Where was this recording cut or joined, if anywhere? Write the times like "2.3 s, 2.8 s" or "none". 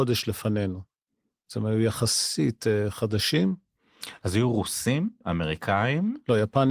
5.2 s